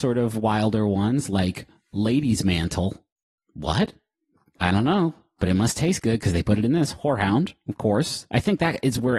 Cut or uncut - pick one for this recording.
uncut